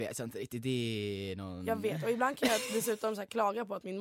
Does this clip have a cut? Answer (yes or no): no